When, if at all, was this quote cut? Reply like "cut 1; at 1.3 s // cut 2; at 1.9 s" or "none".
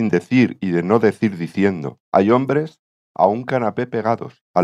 cut 1; at 2.0 s